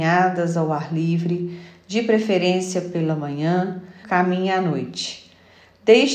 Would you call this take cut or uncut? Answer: cut